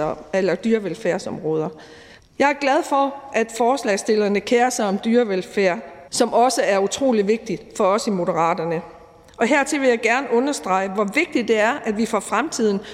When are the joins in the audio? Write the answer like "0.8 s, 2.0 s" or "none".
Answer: 2.2 s, 6.1 s